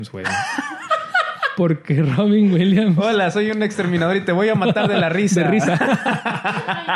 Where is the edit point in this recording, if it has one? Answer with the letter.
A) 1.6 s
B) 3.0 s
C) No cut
C